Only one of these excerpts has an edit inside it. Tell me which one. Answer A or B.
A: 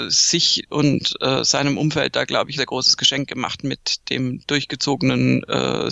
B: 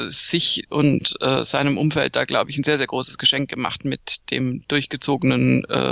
A